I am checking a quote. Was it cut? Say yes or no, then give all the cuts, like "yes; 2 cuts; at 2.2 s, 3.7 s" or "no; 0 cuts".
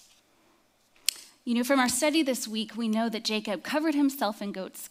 no; 0 cuts